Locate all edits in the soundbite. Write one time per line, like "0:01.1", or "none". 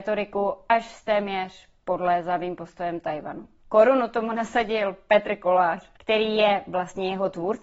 0:06.0